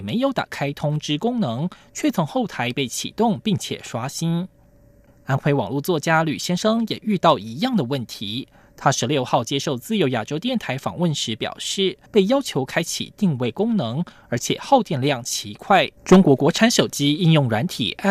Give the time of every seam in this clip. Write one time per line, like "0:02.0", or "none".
0:12.1
0:16.0